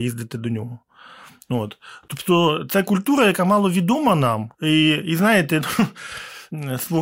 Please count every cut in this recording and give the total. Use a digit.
1